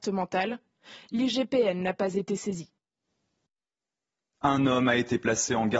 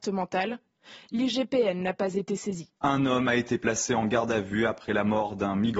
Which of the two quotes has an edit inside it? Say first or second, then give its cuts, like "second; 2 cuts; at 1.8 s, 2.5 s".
second; 1 cut; at 2.8 s